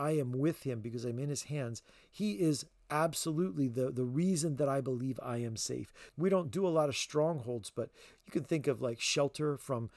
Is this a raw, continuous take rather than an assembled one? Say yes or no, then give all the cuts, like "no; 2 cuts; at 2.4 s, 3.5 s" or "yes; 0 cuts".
no; 1 cut; at 6.1 s